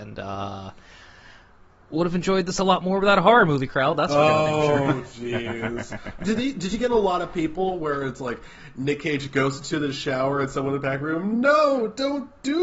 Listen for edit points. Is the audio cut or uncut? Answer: uncut